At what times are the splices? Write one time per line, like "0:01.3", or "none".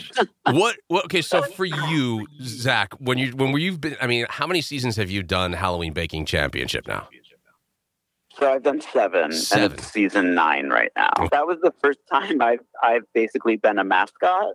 0:11.3